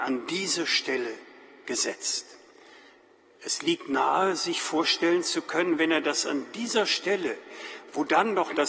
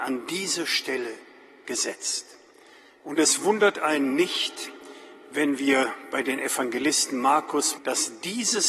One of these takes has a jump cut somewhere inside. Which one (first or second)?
second